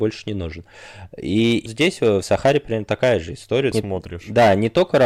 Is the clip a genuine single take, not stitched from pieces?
no; 2 cuts; at 1.7 s, 3.7 s

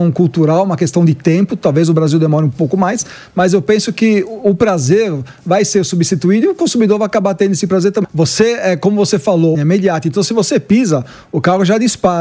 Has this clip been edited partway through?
yes; 2 cuts; at 8.0 s, 9.5 s

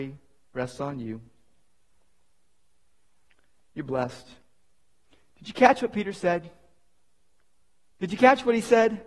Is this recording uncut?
yes; 0 cuts

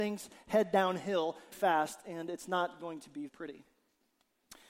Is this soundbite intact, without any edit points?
no; 2 cuts; at 1.5 s, 3.3 s

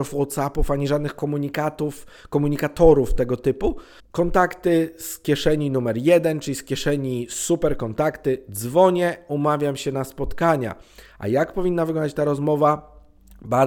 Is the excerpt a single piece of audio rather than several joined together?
no; 1 cut; at 4.0 s

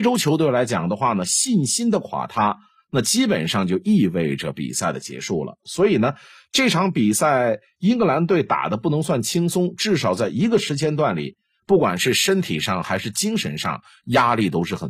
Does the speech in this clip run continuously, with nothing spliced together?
yes; 0 cuts

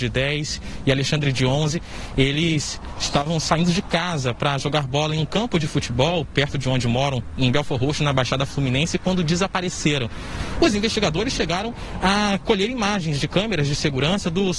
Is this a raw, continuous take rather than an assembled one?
yes; 0 cuts

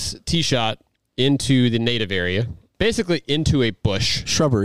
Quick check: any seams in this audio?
yes; 1 cut; at 2.7 s

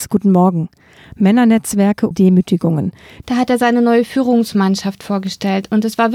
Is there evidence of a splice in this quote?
yes; 2 cuts; at 2.1 s, 3.2 s

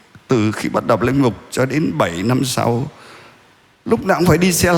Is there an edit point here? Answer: no; 0 cuts

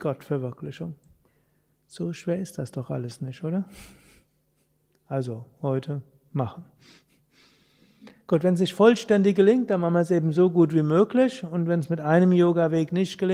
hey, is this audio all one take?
yes; 0 cuts

